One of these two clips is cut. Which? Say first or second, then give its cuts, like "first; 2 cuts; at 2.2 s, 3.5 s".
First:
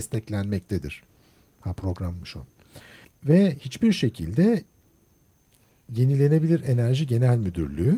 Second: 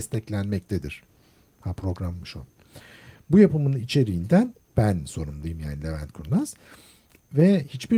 first; 1 cut; at 3.0 s